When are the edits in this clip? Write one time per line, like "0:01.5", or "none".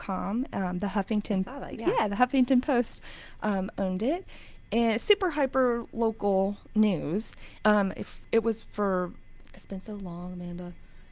0:07.6
0:09.4

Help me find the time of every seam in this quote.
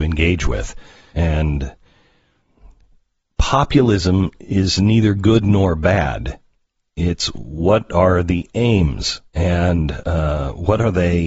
0:01.1
0:09.3

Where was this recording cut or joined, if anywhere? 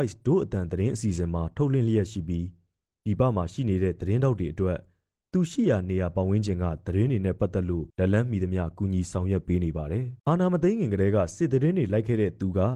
0:07.9
0:10.2

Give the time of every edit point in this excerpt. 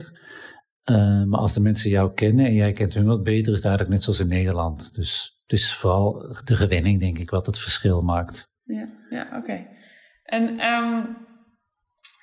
none

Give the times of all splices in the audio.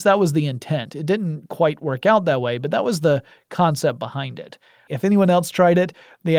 0:04.9

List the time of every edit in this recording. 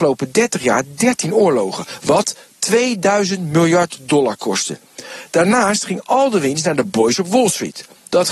none

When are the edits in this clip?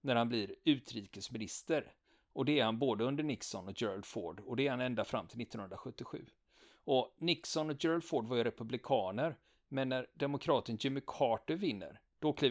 none

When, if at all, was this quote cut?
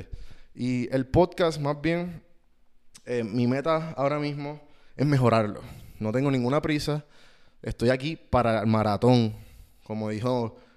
none

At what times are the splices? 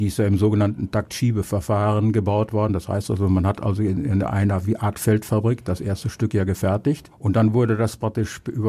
none

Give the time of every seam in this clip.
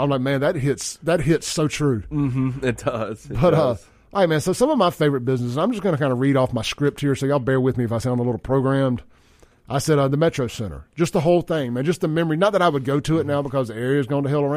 none

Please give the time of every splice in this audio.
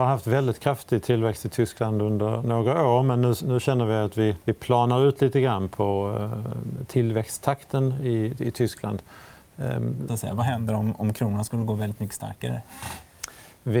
0:04.4
0:10.1

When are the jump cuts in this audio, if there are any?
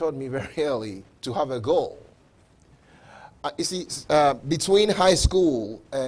none

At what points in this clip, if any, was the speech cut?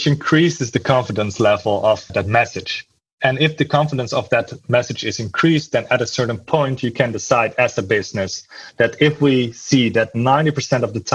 0:02.1

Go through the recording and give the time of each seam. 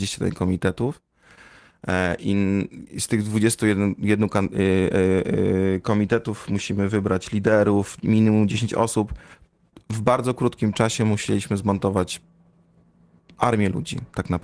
none

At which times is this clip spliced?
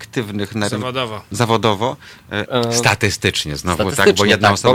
0:02.5

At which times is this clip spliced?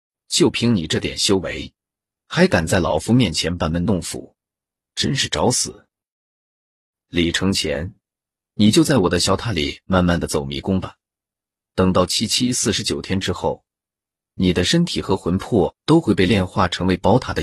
none

